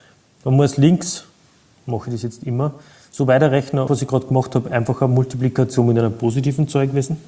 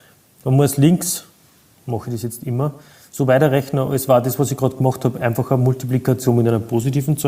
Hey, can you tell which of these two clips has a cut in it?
first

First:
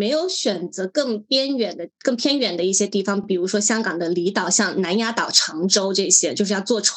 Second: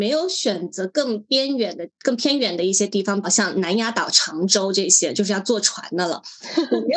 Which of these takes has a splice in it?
second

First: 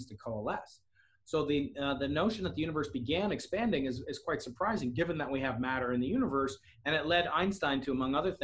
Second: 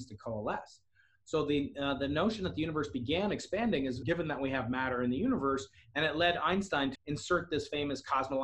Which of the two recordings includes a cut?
second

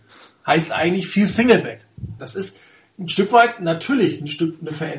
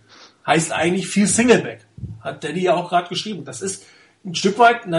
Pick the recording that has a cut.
first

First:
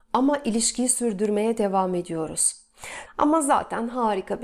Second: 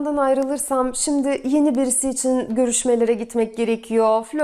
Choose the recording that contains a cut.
first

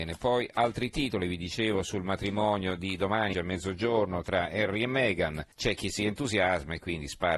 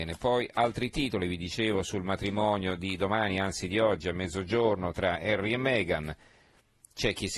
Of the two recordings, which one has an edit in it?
first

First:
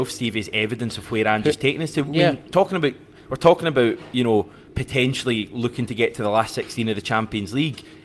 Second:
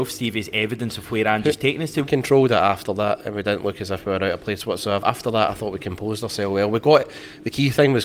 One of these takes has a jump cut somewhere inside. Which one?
second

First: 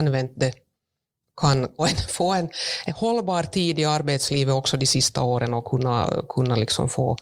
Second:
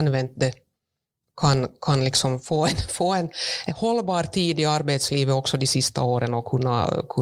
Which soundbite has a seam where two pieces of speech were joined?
first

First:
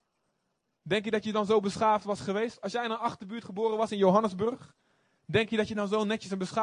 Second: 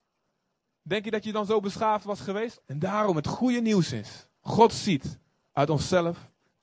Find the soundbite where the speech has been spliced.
second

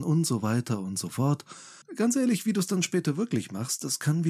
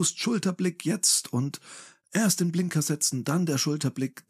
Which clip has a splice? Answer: first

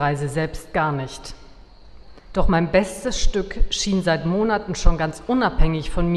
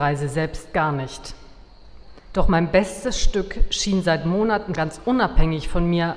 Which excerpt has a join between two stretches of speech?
second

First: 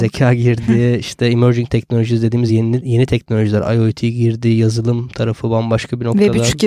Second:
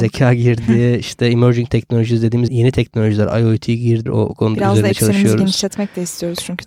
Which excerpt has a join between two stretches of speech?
second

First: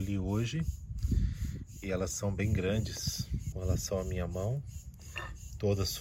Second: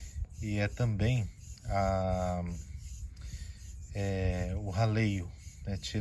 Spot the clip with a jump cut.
first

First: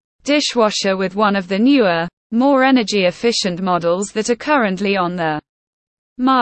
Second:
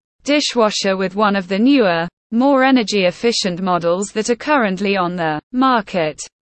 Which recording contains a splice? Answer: second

